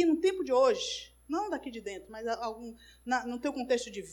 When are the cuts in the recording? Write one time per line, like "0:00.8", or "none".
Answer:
none